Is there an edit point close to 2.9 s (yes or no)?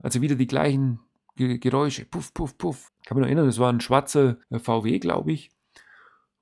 yes